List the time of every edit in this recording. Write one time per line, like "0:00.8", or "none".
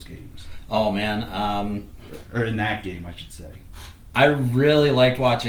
none